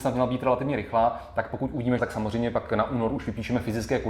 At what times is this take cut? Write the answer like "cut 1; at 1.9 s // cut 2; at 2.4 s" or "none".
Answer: cut 1; at 2.0 s